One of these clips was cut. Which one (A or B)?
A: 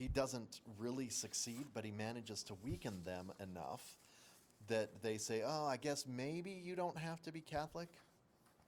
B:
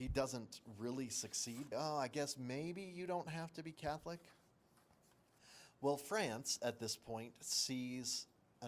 B